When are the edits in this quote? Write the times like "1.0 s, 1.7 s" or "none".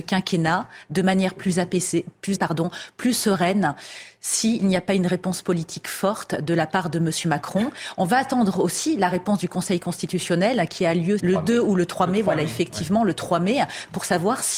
2.3 s, 11.2 s